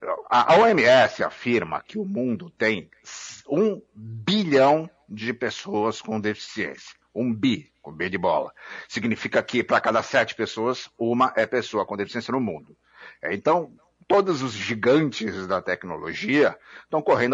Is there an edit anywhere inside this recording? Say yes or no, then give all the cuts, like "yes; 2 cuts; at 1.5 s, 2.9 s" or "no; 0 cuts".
no; 0 cuts